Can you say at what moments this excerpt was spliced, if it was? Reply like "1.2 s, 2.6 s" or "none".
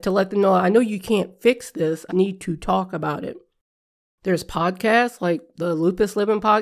2.1 s